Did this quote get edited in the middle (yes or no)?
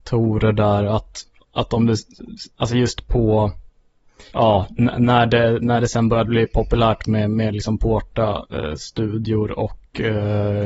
yes